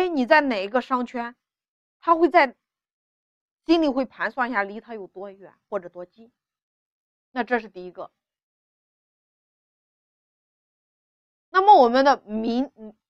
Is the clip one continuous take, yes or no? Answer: yes